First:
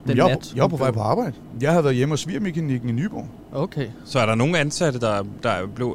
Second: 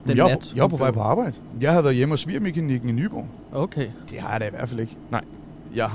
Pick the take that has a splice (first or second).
second